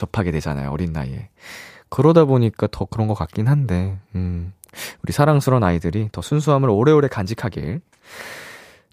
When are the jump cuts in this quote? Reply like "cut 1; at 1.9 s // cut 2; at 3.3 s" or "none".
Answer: none